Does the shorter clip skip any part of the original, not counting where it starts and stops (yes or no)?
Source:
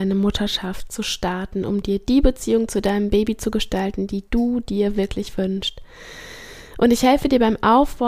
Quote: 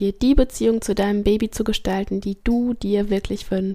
no